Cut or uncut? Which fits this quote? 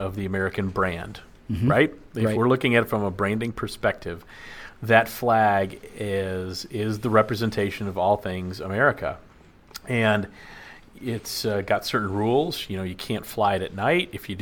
uncut